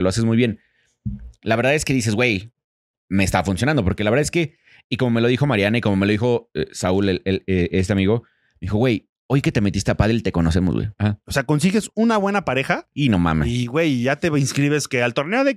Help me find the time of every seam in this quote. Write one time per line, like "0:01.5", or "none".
0:11.0